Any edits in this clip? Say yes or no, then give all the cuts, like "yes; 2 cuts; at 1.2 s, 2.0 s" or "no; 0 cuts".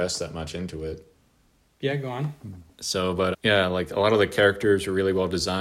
yes; 2 cuts; at 1.6 s, 3.3 s